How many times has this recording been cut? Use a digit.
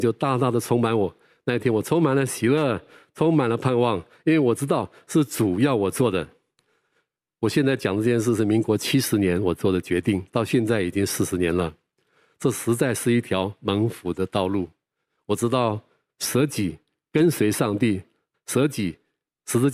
1